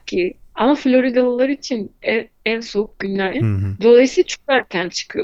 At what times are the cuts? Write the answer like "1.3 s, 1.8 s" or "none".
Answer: 3.3 s